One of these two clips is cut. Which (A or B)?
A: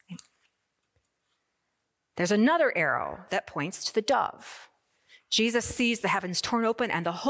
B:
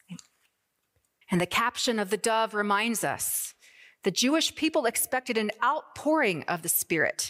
B